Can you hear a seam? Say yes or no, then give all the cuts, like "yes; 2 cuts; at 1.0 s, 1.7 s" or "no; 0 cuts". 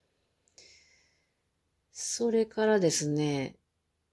no; 0 cuts